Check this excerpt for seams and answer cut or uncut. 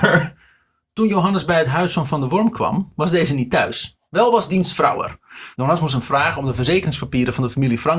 cut